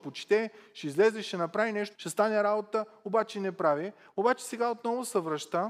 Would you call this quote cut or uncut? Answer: cut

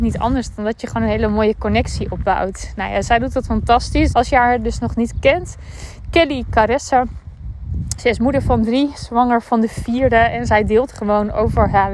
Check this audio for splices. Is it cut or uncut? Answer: cut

